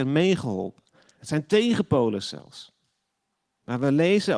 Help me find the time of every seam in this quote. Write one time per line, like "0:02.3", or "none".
0:01.2